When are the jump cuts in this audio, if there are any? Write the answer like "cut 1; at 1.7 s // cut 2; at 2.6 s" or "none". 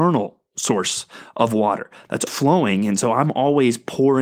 cut 1; at 2.3 s